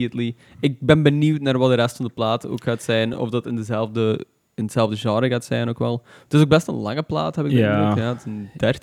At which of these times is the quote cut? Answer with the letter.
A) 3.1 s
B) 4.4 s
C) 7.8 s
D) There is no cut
D